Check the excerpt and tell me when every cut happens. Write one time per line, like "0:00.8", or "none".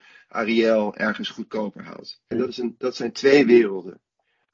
0:02.3